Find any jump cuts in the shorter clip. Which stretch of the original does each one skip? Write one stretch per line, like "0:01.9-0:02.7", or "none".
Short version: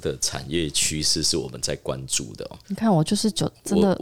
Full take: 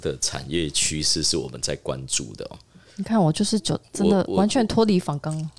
0:02.6-0:02.9